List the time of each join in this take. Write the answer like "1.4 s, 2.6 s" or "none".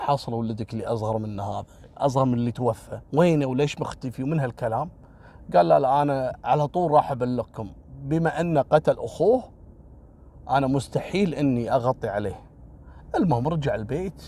3.1 s